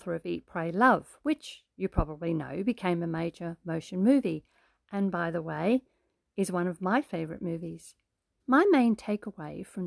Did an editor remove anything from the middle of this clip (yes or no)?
yes